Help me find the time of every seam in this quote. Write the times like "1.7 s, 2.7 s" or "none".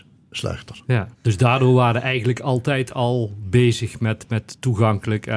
1.1 s